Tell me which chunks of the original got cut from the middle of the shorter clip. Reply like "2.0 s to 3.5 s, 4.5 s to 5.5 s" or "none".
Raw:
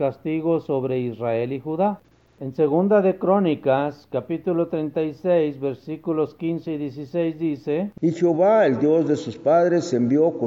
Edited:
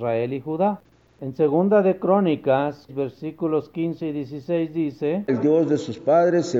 4.1 s to 5.5 s, 7.9 s to 8.7 s

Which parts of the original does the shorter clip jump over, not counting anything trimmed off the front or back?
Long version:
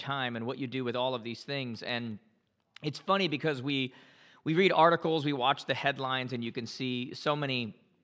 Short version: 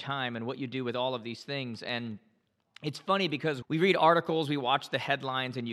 3.6 s to 4.4 s

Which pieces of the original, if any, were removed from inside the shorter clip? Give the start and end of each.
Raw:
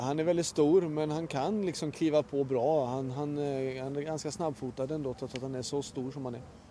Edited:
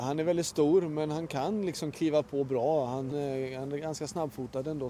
3.1 s to 3.4 s

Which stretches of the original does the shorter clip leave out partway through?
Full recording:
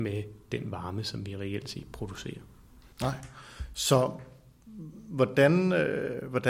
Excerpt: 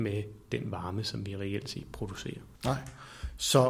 2.5 s to 2.9 s

